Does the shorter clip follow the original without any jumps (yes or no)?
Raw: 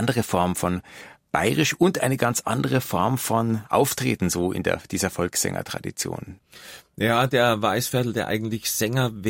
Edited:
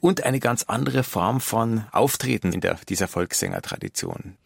no